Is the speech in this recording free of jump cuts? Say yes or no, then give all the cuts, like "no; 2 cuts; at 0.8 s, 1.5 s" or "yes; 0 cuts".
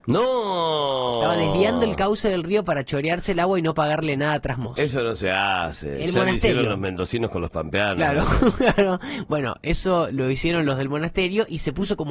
yes; 0 cuts